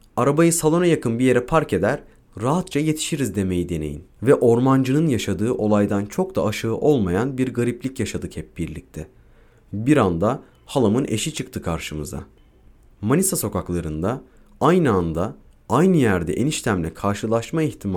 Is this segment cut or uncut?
cut